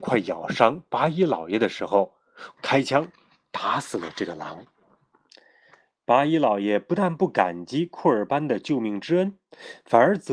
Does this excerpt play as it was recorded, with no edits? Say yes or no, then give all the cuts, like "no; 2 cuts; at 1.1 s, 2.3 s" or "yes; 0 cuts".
no; 1 cut; at 2.6 s